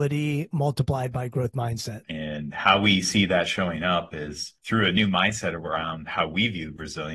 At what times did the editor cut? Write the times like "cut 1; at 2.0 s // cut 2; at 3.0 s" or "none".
cut 1; at 2.0 s // cut 2; at 4.6 s